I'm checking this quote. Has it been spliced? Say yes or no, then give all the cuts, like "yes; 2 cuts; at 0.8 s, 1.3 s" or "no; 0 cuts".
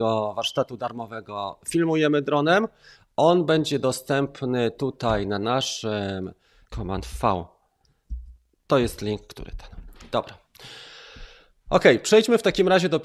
yes; 1 cut; at 6.6 s